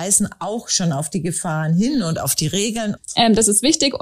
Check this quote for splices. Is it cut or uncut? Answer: cut